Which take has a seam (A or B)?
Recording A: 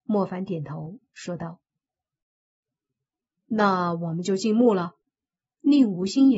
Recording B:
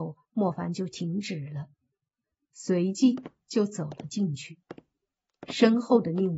A